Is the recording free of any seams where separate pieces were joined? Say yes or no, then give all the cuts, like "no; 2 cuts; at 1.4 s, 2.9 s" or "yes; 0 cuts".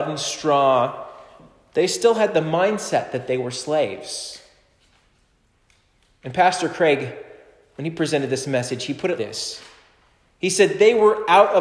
no; 1 cut; at 9.2 s